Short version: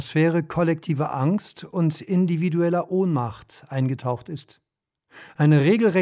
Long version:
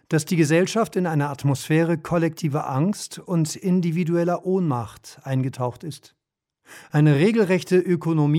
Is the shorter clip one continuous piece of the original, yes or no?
yes